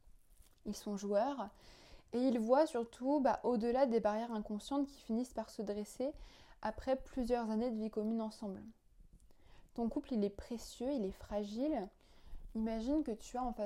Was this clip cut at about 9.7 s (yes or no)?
no